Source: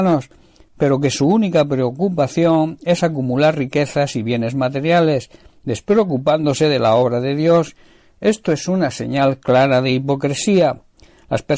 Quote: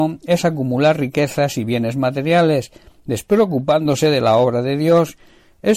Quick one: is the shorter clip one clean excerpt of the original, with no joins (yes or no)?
yes